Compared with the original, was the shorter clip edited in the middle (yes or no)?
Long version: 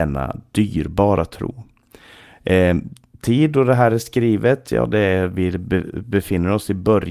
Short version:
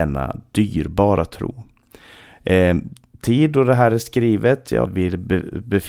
yes